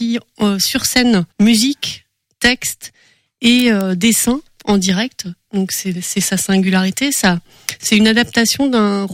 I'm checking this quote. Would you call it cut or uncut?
cut